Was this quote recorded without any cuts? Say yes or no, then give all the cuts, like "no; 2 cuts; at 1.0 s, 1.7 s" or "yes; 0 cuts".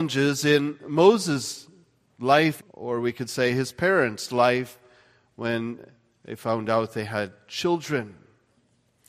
no; 1 cut; at 2.6 s